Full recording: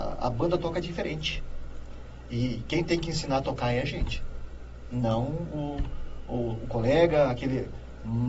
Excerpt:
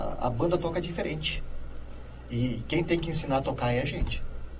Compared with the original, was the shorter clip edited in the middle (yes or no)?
no